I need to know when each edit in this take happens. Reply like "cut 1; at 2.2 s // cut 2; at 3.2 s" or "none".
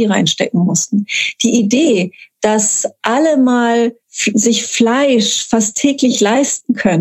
cut 1; at 4.0 s

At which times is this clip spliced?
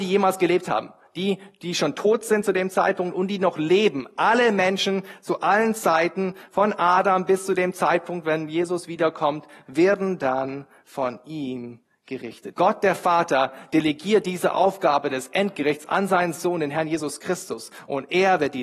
cut 1; at 12.5 s

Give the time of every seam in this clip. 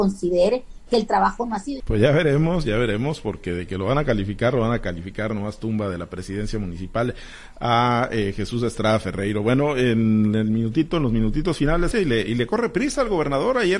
cut 1; at 1.8 s // cut 2; at 11.9 s

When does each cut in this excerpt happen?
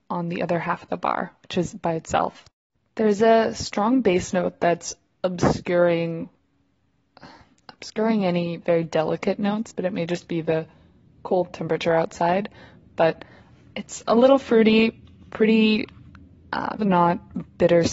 cut 1; at 16.8 s

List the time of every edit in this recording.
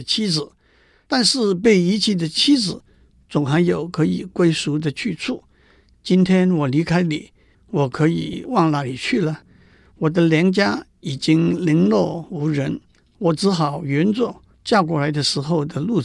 none

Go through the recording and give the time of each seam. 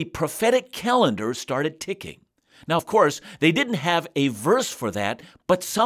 none

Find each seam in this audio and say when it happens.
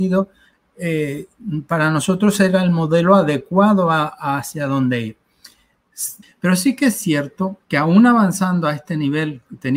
cut 1; at 6.2 s // cut 2; at 7.6 s

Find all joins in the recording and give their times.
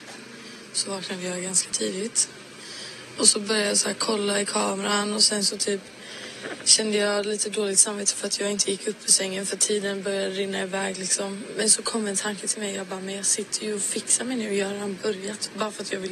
cut 1; at 3.2 s

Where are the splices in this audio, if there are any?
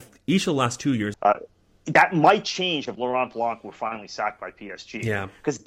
cut 1; at 1.1 s

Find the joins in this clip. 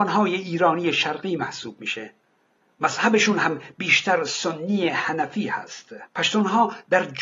cut 1; at 6.1 s

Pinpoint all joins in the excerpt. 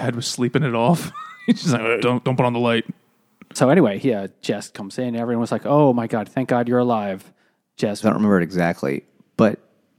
cut 1; at 2.0 s // cut 2; at 8.0 s

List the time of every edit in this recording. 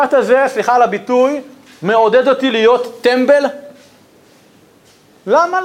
none

